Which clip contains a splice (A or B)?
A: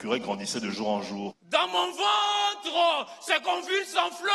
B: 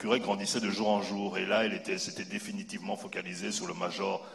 A